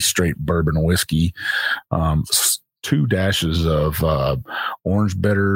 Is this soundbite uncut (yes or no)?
yes